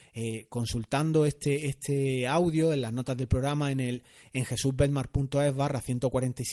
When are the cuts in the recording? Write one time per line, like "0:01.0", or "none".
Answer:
none